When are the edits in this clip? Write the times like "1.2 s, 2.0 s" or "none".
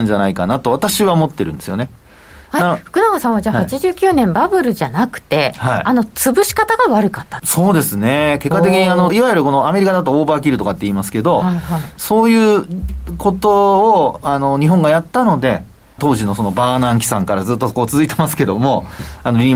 7.4 s, 9.1 s, 16.0 s